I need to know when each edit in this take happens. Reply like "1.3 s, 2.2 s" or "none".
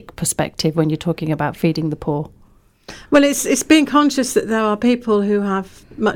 none

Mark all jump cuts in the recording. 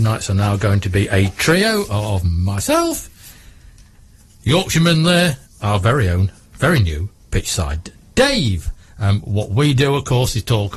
5.5 s

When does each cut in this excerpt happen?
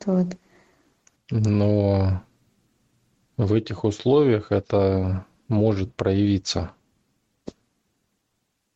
1.2 s

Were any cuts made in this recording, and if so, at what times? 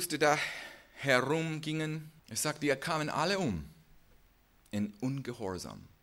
2.2 s

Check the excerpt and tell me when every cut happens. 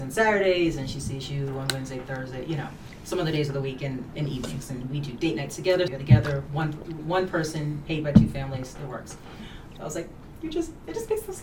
5.9 s, 9.8 s

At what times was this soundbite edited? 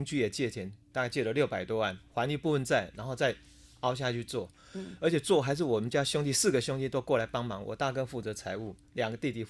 none

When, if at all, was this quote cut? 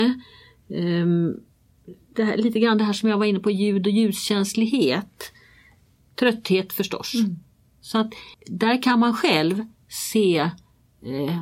8.3 s

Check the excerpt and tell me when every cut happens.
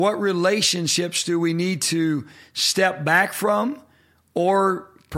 none

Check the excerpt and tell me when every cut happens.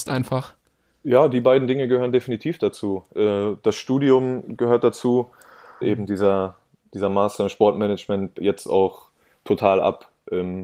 5.8 s, 8.4 s

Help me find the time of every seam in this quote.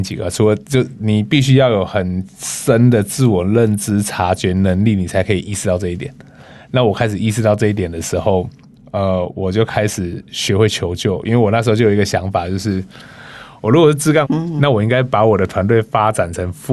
14.2 s

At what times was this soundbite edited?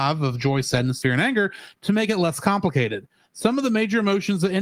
1.0 s

